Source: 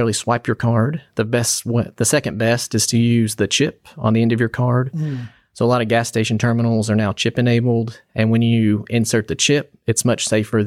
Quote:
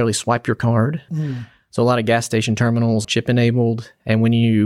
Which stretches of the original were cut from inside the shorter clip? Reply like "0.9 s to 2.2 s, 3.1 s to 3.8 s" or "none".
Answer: 1.1 s to 4.9 s, 6.9 s to 7.1 s